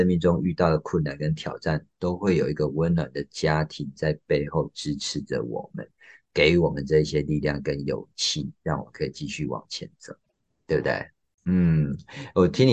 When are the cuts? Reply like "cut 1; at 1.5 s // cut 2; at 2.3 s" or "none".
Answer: cut 1; at 11.4 s